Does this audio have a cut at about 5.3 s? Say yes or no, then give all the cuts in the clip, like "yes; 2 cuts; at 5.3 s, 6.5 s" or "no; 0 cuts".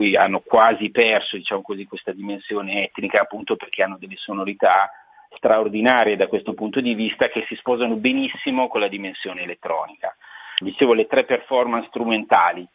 no; 1 cut; at 10.6 s